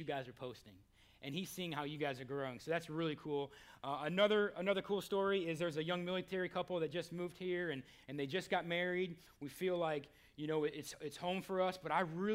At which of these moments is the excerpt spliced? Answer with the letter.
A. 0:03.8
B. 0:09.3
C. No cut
B